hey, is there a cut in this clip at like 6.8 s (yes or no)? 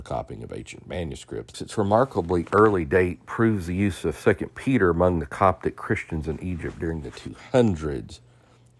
no